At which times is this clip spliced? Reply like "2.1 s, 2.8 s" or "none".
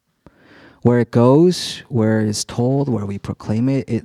none